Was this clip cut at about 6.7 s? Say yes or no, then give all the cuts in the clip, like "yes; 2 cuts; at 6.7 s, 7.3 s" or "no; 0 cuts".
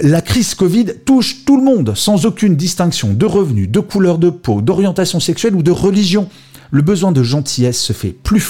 yes; 1 cut; at 6.7 s